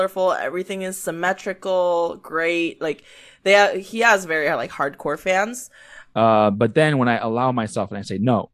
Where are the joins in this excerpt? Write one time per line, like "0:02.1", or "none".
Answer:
0:06.1